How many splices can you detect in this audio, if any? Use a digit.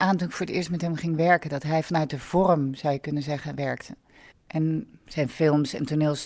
1